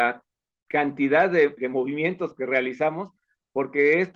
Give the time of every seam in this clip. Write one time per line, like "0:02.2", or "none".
0:01.6